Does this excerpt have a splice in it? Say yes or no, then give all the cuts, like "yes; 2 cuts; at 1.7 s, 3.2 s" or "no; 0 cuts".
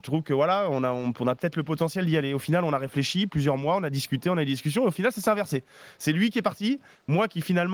no; 0 cuts